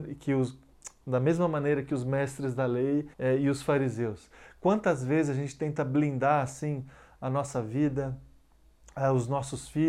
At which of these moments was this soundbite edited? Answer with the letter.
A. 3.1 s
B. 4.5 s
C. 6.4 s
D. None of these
A